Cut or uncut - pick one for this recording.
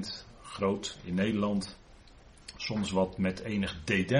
uncut